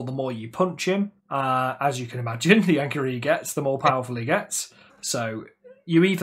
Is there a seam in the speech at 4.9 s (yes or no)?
yes